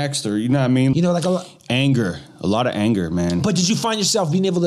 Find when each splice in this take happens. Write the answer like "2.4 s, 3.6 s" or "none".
0.9 s

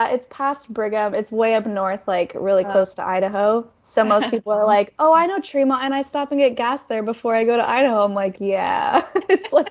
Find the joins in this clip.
none

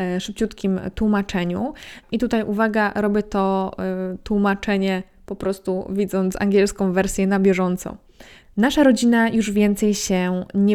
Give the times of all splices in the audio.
2.0 s, 8.4 s

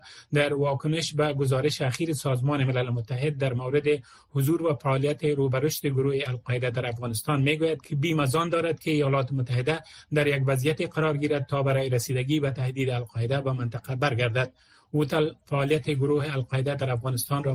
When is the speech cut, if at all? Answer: 7.8 s

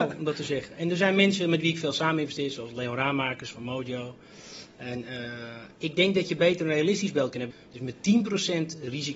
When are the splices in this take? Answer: 5.7 s, 7.5 s

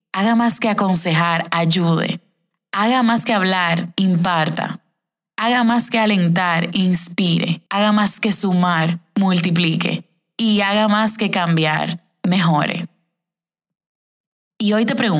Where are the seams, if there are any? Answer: 7.7 s

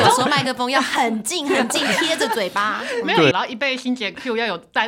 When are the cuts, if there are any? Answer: 3.3 s

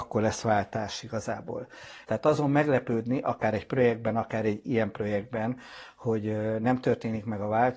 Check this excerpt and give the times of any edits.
2.0 s

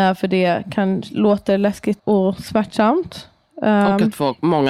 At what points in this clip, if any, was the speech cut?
2.0 s

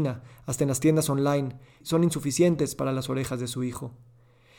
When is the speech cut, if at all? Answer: 1.8 s

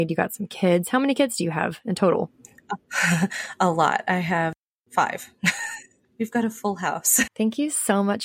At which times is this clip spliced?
7.3 s

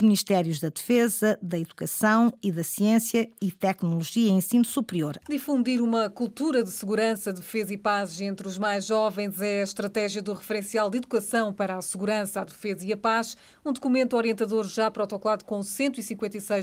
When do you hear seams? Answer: 5.2 s

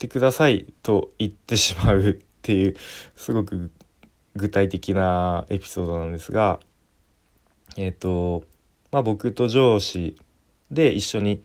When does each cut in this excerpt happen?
none

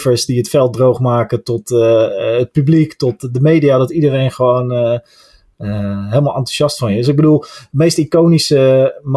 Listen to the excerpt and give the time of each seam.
none

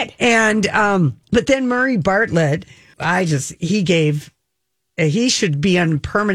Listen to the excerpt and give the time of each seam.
1.2 s, 2.9 s

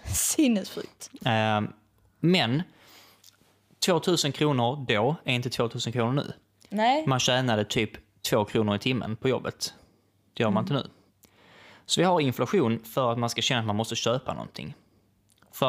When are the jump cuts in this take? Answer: none

